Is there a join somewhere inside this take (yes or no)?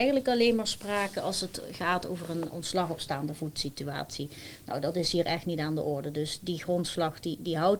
no